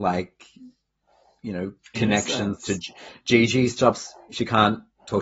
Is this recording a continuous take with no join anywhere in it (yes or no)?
yes